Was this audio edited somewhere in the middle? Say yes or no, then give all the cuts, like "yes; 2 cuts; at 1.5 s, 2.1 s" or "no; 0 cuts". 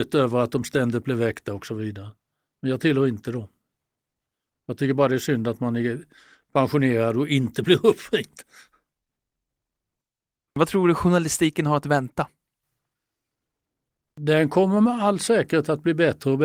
no; 0 cuts